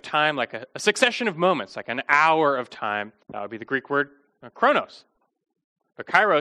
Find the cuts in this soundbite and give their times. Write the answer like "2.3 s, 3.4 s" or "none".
3.2 s